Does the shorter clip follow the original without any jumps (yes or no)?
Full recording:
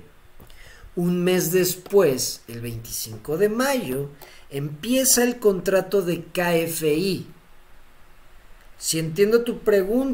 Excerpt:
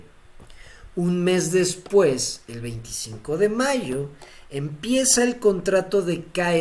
yes